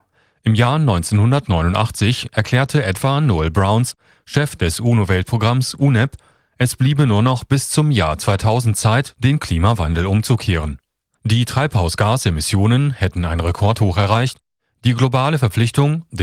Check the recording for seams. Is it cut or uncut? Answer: cut